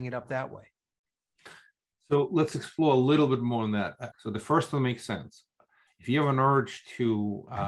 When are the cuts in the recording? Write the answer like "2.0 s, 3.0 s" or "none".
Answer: 4.1 s